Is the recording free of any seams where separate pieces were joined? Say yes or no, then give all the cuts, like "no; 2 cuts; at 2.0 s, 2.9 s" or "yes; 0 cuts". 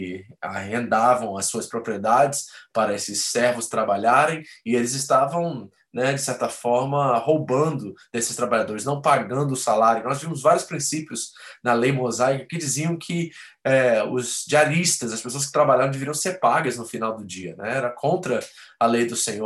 yes; 0 cuts